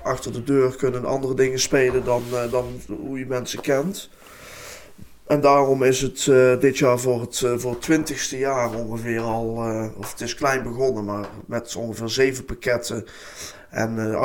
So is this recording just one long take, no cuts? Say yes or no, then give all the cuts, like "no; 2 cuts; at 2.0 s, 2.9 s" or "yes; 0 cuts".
yes; 0 cuts